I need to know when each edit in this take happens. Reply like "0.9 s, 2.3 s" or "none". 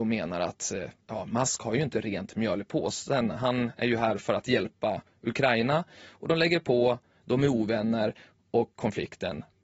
none